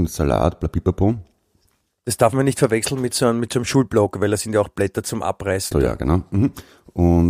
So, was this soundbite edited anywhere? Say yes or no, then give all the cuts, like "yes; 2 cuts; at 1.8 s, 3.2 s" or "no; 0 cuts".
yes; 1 cut; at 5.7 s